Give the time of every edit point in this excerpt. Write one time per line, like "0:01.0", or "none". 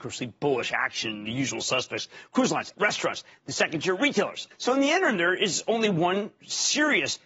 0:02.7
0:04.5